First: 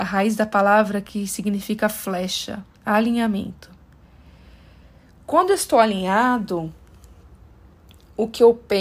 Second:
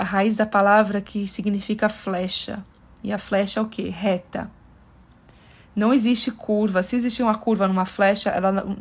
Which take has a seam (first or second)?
first